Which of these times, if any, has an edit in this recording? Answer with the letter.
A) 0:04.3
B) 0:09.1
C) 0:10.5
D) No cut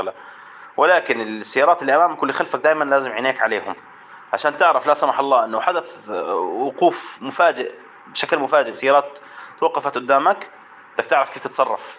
D